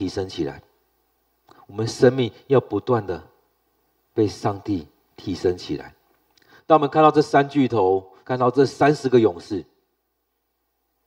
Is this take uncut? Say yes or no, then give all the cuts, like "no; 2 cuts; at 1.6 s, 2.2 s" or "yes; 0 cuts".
no; 2 cuts; at 6.6 s, 8.2 s